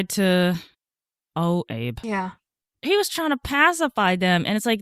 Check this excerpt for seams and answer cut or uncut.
uncut